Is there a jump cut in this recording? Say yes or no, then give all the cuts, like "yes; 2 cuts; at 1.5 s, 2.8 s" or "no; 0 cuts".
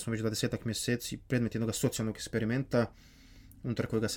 no; 0 cuts